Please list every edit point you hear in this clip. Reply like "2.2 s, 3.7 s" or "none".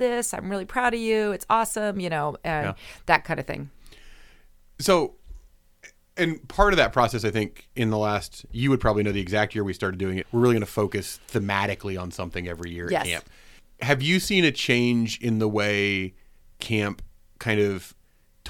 10.2 s